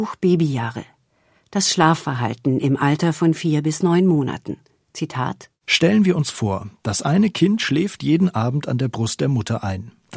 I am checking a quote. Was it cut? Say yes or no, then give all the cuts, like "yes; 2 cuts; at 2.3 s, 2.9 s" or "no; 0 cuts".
no; 0 cuts